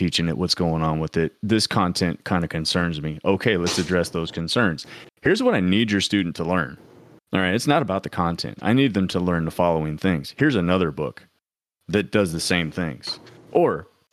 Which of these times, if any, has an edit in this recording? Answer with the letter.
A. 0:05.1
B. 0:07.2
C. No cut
A